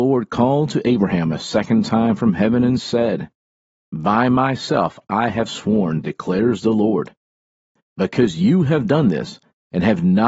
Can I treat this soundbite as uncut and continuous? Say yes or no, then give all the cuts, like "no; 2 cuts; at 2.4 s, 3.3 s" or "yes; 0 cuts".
yes; 0 cuts